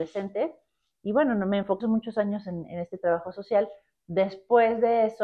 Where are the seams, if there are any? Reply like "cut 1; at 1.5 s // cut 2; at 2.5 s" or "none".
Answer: cut 1; at 1.8 s